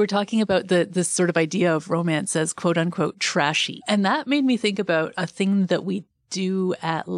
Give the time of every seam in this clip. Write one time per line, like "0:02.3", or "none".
none

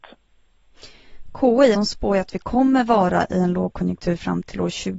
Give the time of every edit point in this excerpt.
0:01.7

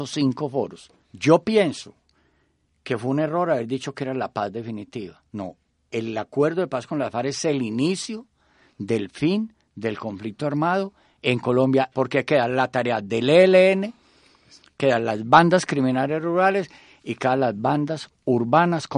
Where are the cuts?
0:01.0
0:11.9

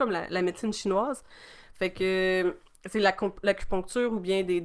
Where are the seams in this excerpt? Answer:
none

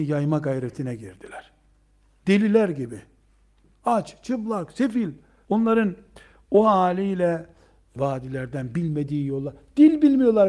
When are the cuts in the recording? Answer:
0:05.4
0:08.0

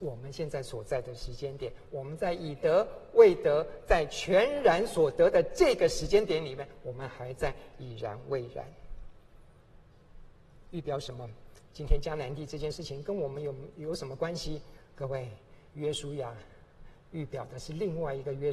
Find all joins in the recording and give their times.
0:10.6
0:15.7

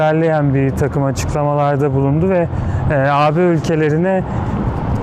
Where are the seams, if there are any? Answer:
none

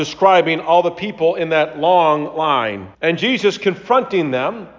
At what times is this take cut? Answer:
0:02.9

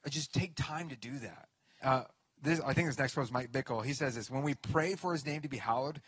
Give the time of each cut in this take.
0:01.8

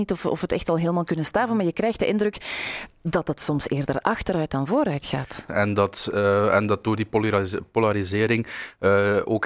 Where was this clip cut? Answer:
0:05.5

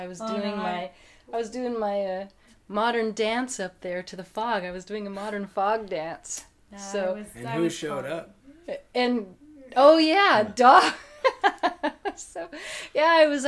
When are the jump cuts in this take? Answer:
none

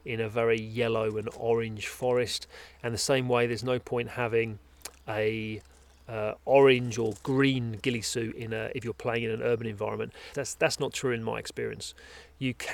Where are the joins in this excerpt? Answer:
0:10.3

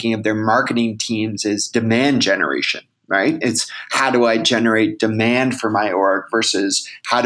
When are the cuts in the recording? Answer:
none

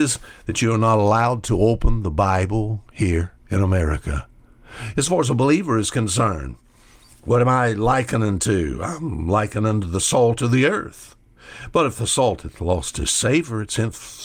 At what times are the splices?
0:03.4
0:04.9

